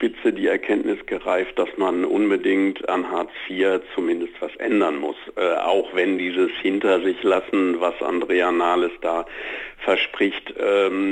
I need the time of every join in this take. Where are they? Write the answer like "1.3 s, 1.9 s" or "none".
none